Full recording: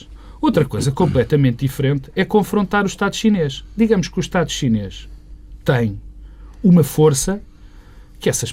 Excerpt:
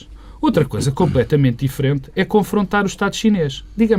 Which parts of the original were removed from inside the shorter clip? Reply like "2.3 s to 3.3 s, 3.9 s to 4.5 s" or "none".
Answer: none